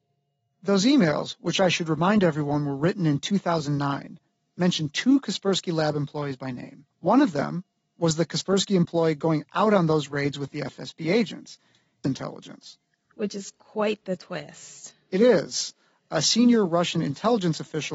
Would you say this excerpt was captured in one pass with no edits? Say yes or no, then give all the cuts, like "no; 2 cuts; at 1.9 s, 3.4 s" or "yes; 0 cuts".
no; 2 cuts; at 6.9 s, 12.0 s